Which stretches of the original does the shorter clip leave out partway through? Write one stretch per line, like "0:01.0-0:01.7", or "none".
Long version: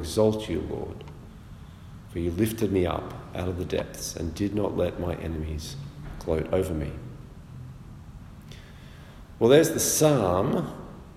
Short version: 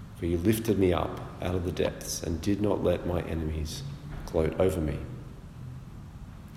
none